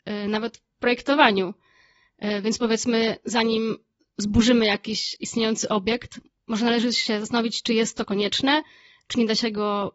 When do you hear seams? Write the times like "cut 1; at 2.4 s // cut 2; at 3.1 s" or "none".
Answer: none